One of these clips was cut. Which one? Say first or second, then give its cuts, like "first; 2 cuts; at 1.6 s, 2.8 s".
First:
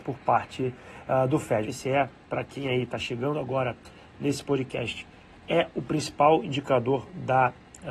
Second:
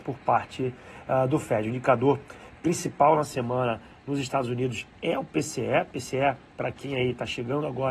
first; 1 cut; at 1.6 s